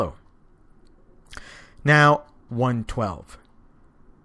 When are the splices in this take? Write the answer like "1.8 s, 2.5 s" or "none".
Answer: 2.5 s